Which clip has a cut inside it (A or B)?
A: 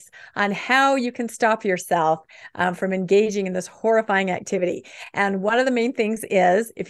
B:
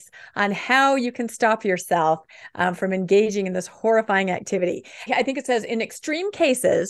B